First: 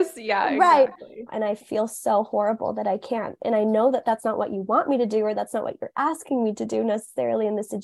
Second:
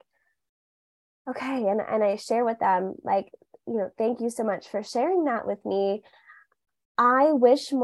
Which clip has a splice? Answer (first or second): first